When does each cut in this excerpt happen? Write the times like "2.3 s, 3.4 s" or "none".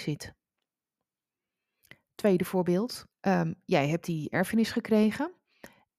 3.1 s